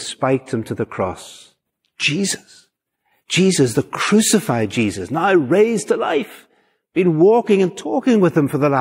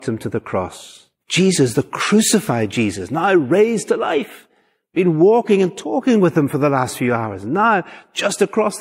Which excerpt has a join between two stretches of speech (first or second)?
second